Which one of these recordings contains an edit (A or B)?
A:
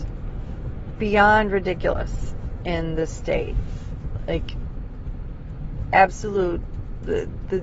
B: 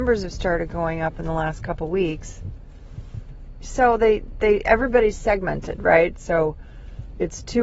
B